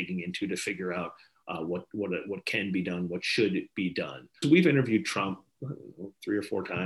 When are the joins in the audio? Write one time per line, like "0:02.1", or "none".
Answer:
0:04.4

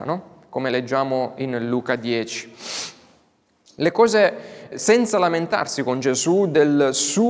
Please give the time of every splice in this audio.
0:04.7

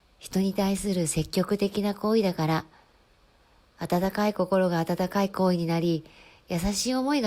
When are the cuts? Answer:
none

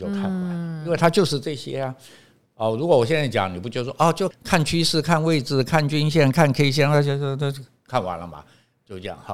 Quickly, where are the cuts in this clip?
0:04.3

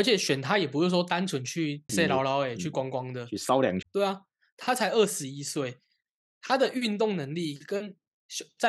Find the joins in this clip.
0:01.9
0:03.8

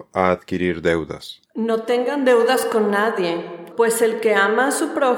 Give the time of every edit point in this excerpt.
0:01.5
0:03.7

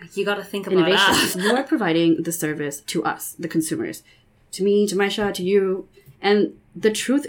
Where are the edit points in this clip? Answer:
0:01.3

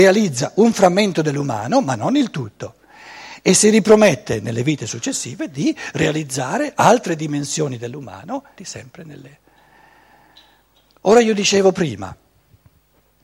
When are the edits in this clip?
0:08.6

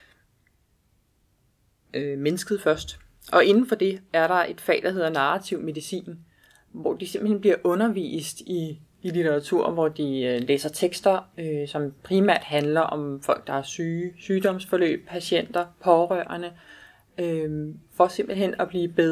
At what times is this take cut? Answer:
none

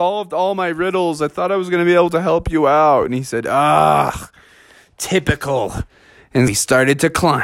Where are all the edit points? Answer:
0:06.5

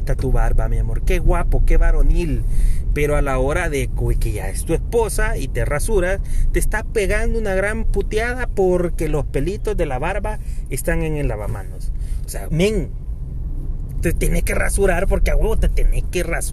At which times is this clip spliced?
0:12.5
0:14.0

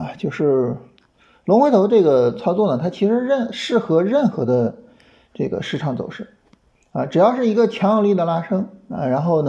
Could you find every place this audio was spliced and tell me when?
none

